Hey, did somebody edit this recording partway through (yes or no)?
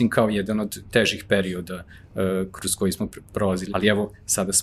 yes